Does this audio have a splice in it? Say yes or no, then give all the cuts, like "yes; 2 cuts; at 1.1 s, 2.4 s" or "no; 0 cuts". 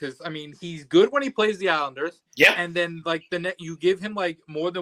yes; 1 cut; at 2.3 s